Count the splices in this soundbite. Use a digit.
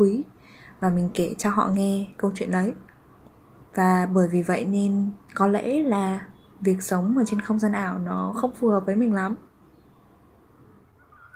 1